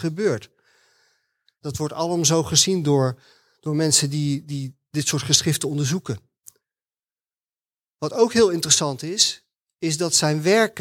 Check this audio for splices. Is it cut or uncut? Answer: cut